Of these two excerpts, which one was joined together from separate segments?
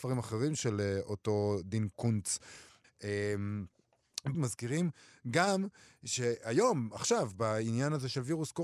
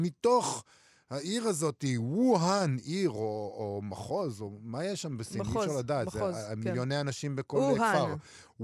first; 2 cuts; at 2.8 s, 4.3 s

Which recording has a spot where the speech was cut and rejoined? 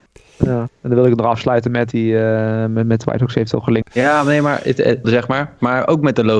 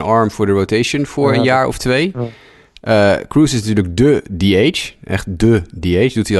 first; 3 cuts; at 1.9 s, 3.8 s, 5.0 s

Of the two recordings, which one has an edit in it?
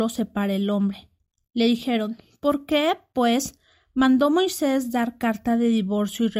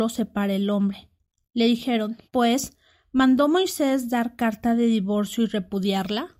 second; 1 cut; at 2.2 s

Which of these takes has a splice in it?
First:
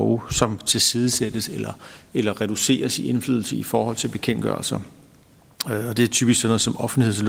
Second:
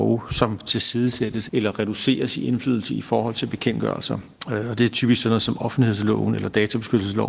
second; 2 cuts; at 1.5 s, 4.4 s

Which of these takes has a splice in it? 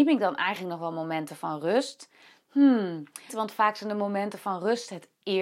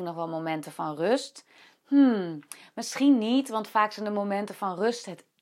first; 1 cut; at 3.3 s

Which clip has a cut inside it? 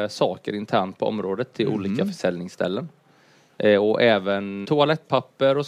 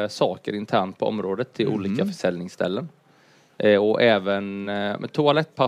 first; 1 cut; at 4.6 s

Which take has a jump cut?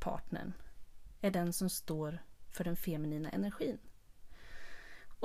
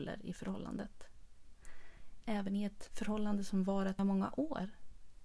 second; 2 cuts; at 2.2 s, 4.0 s

